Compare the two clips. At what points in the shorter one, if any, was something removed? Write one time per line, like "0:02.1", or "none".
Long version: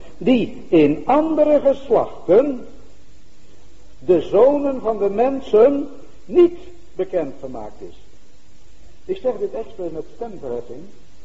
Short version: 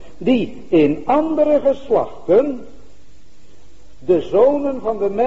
none